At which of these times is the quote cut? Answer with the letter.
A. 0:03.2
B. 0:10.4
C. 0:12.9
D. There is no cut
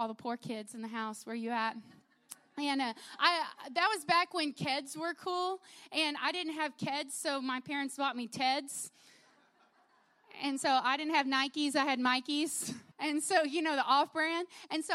C